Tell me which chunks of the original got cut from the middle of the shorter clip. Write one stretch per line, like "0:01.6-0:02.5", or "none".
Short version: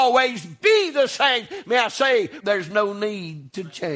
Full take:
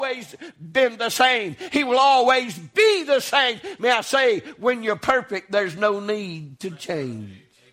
0:04.5-0:05.5